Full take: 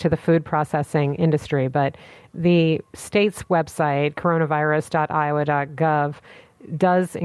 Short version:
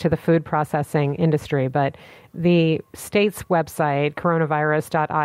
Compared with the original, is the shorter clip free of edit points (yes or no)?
yes